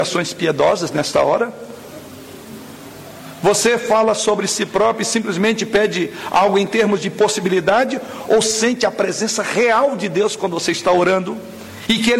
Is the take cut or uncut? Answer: uncut